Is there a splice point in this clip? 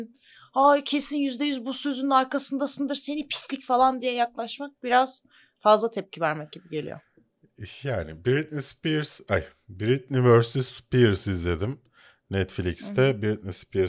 no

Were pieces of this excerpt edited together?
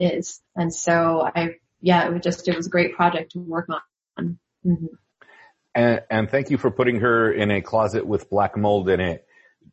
no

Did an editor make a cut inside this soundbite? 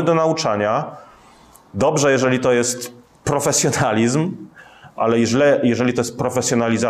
no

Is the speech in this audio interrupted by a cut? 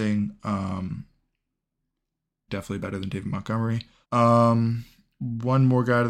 yes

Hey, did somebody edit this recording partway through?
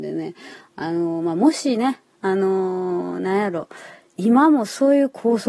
no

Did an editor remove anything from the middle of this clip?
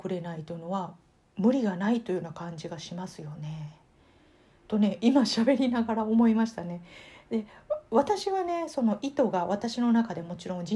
no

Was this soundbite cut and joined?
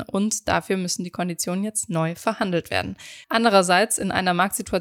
yes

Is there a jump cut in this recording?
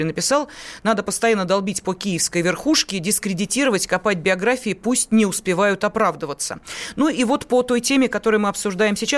no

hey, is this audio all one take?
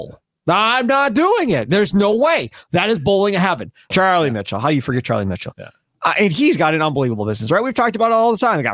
no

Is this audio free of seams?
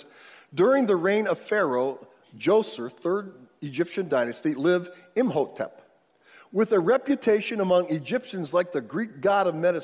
yes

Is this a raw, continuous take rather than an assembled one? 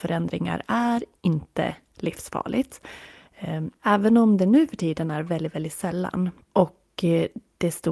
no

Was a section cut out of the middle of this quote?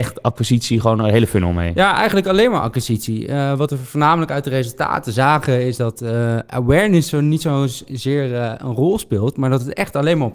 no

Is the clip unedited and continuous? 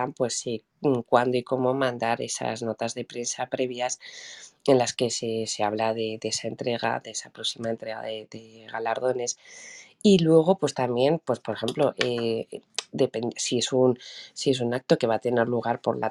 yes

